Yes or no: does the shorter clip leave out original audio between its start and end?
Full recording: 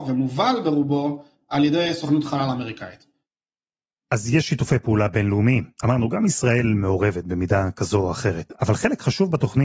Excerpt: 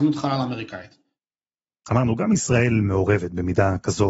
yes